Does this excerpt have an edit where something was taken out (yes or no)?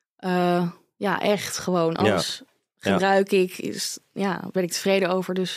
no